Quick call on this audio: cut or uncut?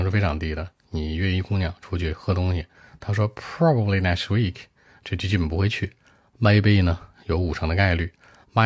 uncut